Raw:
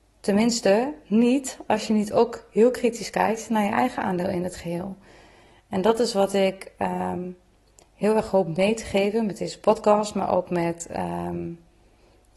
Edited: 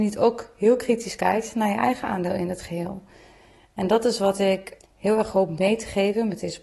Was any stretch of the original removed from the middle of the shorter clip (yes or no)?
yes